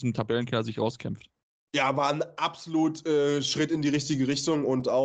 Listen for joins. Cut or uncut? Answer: uncut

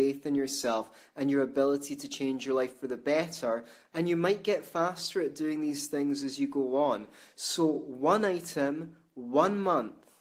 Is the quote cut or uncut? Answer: uncut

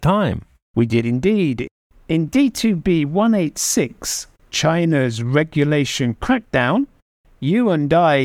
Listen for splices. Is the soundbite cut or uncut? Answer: uncut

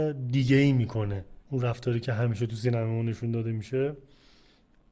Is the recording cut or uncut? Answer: cut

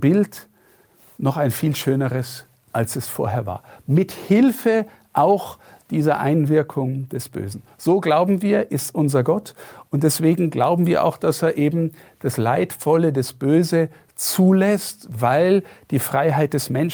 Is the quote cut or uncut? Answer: uncut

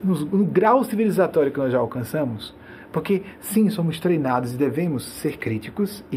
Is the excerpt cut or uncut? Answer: uncut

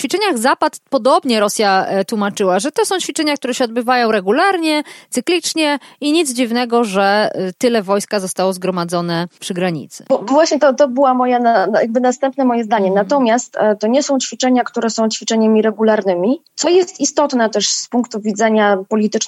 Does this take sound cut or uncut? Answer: cut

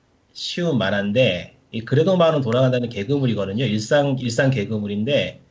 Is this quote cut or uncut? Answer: uncut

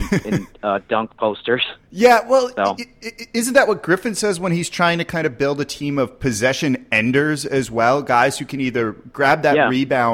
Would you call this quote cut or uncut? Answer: uncut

